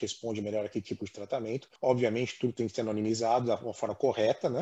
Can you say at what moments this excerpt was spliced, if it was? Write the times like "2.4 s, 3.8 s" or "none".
1.8 s